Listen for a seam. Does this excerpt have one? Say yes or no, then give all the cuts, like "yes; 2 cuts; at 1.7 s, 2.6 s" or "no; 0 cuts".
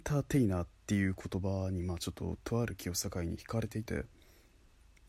yes; 1 cut; at 3.9 s